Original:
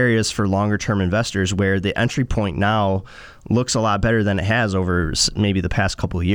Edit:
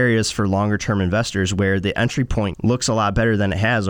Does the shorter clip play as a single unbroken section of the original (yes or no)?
no